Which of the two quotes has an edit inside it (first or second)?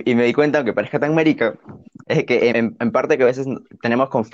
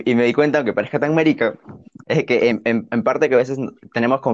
first